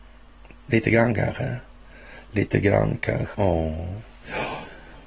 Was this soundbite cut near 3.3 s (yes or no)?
yes